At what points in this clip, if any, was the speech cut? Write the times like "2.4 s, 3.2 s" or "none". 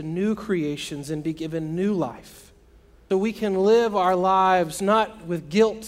3.1 s